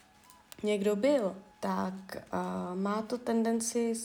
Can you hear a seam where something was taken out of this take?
yes; 1 cut; at 1.5 s

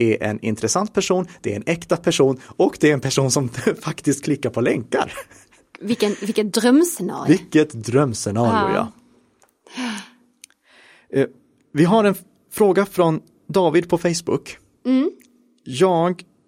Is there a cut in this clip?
no; 0 cuts

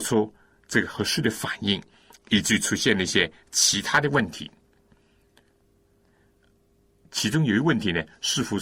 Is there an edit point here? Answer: no; 0 cuts

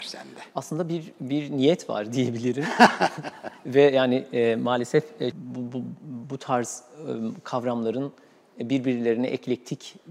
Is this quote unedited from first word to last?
no; 1 cut; at 5.3 s

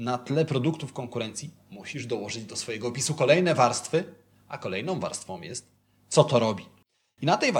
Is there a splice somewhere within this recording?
no; 0 cuts

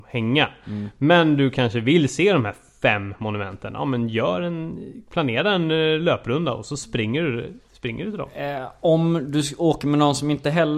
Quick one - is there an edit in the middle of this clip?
no; 0 cuts

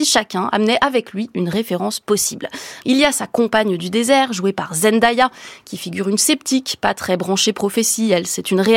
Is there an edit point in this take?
yes; 1 cut; at 2.8 s

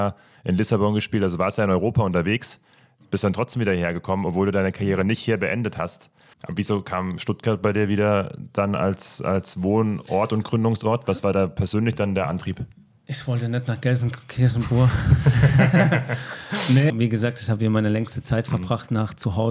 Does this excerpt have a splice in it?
yes; 2 cuts; at 6.3 s, 16.9 s

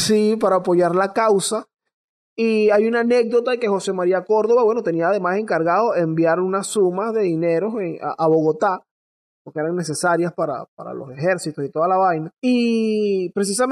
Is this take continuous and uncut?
yes; 0 cuts

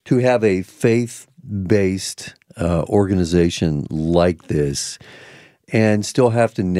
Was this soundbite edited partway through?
no; 0 cuts

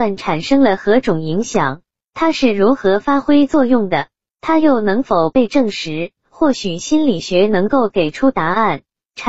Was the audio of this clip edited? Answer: yes; 1 cut; at 6.2 s

